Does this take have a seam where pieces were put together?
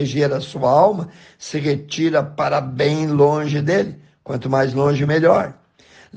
no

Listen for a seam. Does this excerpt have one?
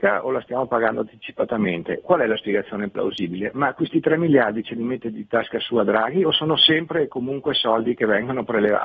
yes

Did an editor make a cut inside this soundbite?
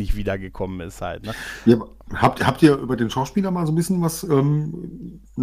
no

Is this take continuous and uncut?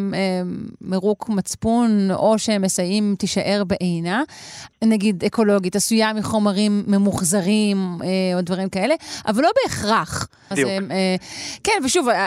no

